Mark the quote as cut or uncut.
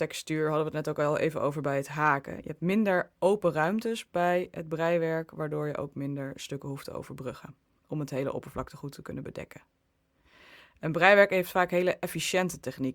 uncut